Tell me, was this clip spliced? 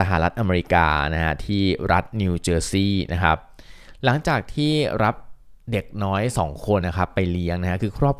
yes; 1 cut; at 6.8 s

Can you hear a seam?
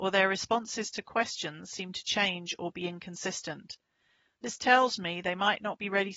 no; 0 cuts

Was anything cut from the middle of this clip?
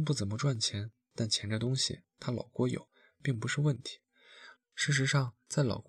yes; 1 cut; at 4.6 s

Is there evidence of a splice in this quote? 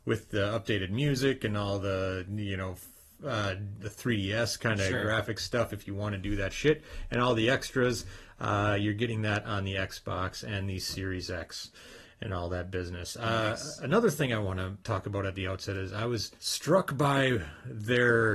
yes; 3 cuts; at 3.8 s, 14.8 s, 16.4 s

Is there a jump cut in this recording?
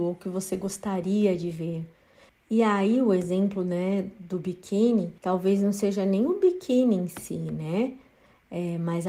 yes; 2 cuts; at 2.3 s, 5.2 s

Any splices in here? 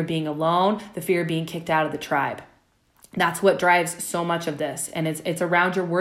no; 0 cuts

